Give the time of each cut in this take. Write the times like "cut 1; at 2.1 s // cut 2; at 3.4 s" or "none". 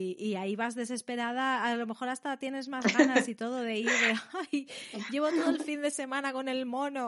none